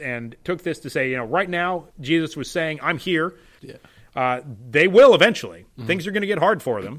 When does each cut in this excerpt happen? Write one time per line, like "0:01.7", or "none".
0:01.9
0:03.6